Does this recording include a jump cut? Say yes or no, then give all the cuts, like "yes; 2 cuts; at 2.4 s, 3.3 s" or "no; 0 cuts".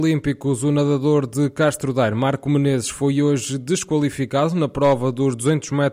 no; 0 cuts